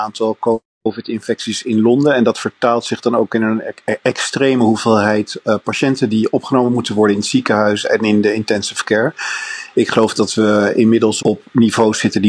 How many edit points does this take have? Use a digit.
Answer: 1